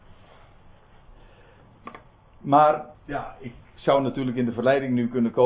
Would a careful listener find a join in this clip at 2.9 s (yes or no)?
yes